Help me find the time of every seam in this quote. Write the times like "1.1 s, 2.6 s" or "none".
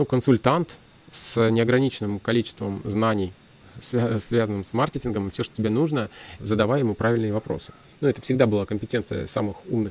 6.4 s

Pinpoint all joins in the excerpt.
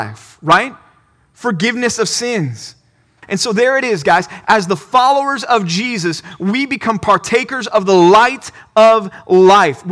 3.2 s

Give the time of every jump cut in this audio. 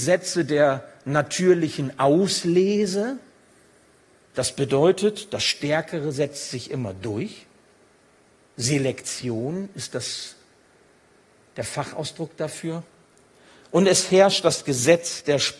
none

